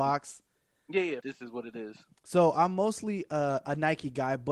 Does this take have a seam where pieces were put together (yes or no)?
yes